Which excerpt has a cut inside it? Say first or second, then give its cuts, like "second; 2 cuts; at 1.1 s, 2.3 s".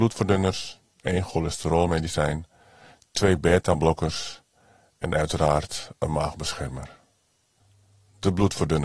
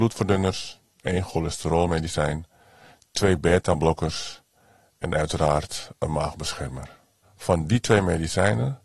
second; 1 cut; at 7.2 s